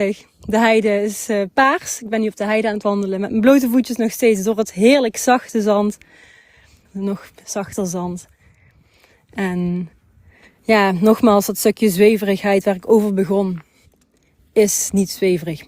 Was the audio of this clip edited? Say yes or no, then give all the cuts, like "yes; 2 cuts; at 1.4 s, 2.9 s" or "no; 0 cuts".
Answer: yes; 1 cut; at 6.8 s